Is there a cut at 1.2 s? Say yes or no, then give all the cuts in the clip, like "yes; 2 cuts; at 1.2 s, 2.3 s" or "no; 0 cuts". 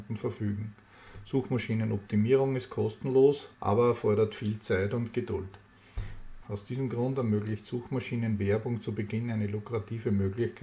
no; 2 cuts; at 3.5 s, 6.4 s